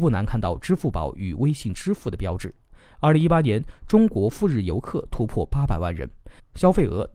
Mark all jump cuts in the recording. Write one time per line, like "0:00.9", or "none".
none